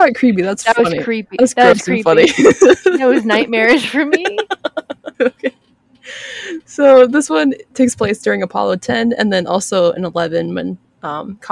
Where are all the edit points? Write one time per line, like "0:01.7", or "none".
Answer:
0:05.1